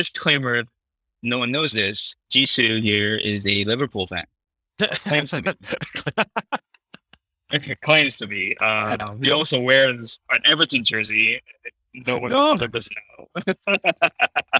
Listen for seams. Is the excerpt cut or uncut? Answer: uncut